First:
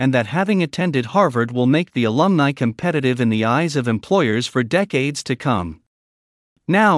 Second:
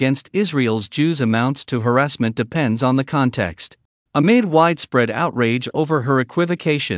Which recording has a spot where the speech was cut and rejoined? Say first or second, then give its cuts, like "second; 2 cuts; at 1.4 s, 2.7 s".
second; 1 cut; at 4.1 s